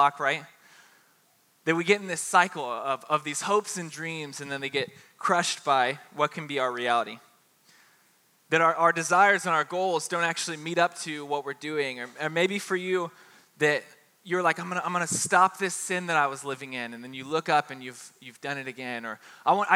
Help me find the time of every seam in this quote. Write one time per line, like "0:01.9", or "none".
none